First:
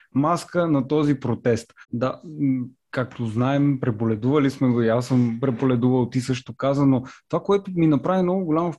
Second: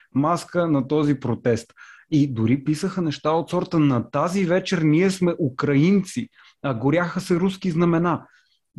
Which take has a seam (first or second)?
first